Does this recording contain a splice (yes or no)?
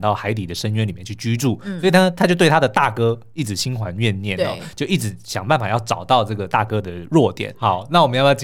yes